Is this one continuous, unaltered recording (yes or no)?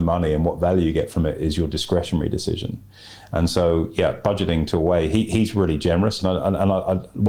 no